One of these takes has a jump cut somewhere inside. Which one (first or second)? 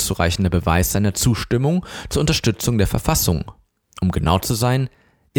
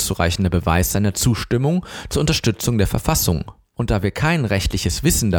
second